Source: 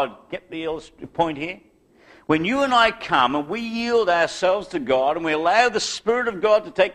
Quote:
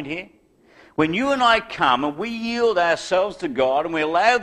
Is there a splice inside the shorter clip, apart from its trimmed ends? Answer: no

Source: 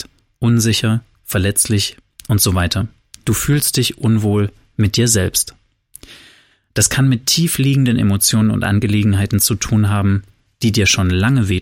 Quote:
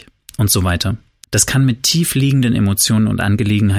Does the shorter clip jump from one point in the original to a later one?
yes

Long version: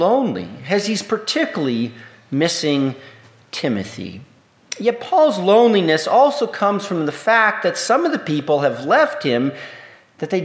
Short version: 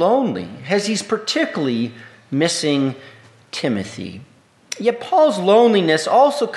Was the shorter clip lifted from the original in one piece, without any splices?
yes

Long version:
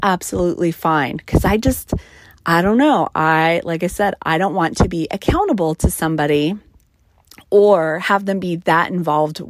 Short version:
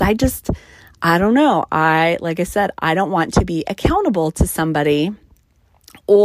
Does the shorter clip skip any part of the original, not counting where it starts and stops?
no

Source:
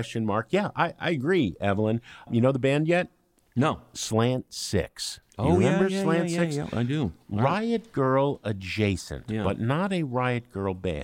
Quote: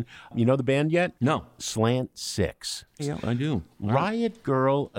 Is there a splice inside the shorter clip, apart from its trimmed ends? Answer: yes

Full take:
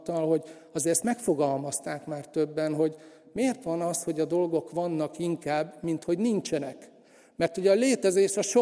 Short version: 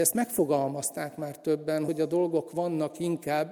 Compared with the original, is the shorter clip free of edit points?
no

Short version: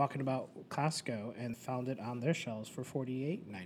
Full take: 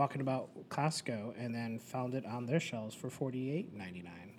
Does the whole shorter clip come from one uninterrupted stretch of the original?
no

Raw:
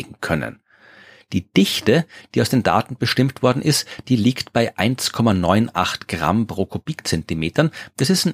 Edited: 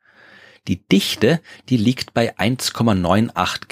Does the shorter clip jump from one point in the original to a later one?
yes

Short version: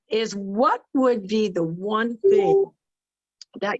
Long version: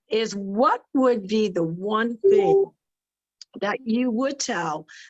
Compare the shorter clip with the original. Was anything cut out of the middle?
no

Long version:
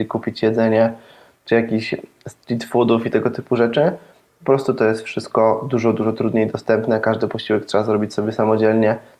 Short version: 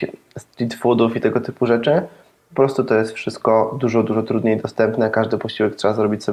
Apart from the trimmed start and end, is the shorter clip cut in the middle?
no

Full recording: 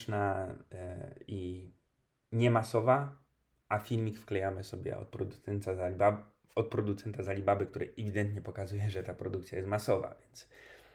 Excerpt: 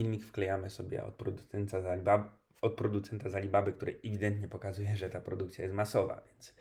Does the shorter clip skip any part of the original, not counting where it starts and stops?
no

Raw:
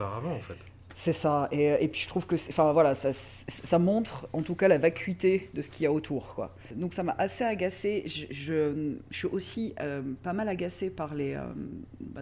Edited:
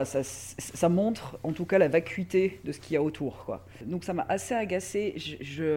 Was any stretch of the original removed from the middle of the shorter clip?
no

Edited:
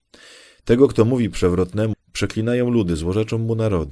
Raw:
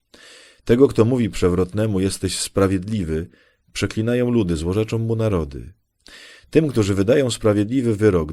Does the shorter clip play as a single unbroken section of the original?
no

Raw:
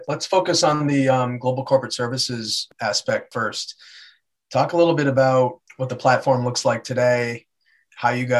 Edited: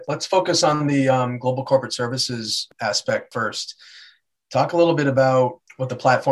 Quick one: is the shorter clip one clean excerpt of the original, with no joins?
yes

